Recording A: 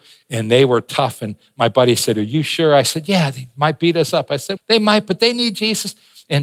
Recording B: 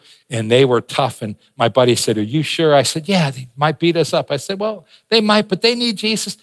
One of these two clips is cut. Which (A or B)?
A